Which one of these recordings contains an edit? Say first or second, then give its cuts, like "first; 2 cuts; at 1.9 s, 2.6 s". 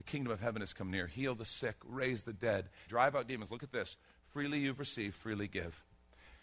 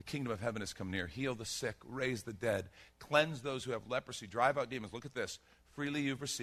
first; 1 cut; at 2.9 s